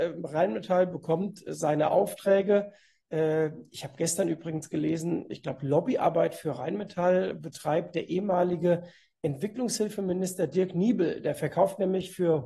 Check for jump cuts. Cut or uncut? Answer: uncut